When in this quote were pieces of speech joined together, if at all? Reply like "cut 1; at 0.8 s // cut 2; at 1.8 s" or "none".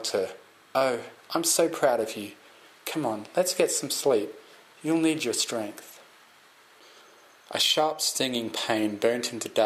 none